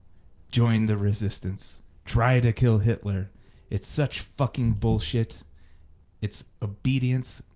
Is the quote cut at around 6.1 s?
no; 0 cuts

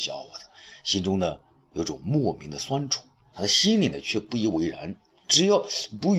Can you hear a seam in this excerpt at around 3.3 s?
yes; 2 cuts; at 3.3 s, 5.2 s

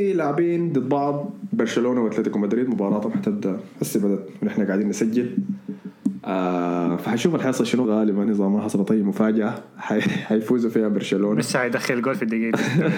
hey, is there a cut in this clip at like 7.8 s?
yes; 1 cut; at 7.8 s

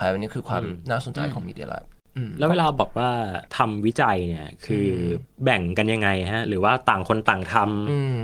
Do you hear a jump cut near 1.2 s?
no; 1 cut; at 3.5 s

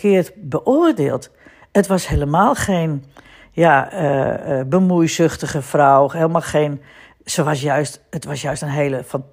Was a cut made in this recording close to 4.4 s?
no; 0 cuts

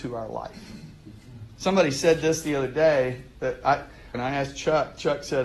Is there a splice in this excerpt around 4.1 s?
yes; 2 cuts; at 1.6 s, 4.1 s

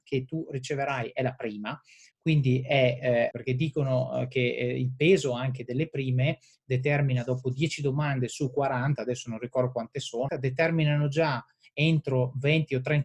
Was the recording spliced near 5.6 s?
no; 3 cuts; at 2.1 s, 3.3 s, 10.3 s

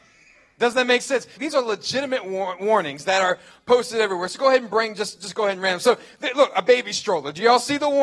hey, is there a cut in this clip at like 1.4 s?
yes; 1 cut; at 1.4 s

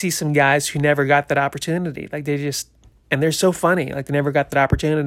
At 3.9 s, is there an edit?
no; 0 cuts

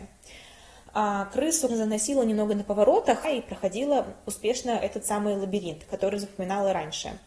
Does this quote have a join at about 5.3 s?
no; 2 cuts; at 1.7 s, 3.2 s

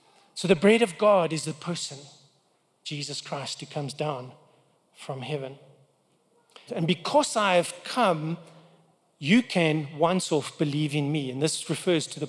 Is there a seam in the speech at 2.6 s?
no; 1 cut; at 6.7 s

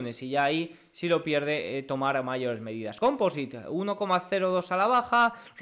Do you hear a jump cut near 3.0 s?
no; 0 cuts

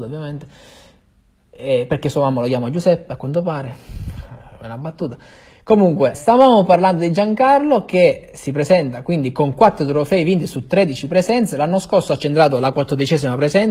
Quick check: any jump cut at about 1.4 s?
no; 1 cut; at 6.1 s

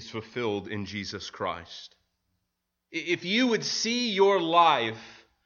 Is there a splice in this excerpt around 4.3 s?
no; 1 cut; at 2.9 s

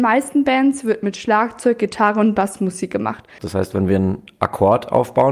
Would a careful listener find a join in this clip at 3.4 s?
yes; 1 cut; at 3.4 s

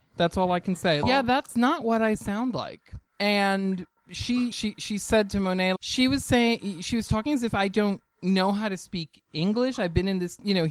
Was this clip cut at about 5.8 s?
yes; 3 cuts; at 1.0 s, 4.5 s, 5.8 s

